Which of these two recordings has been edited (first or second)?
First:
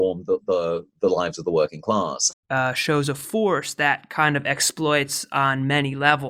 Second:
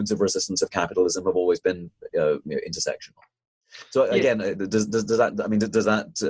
first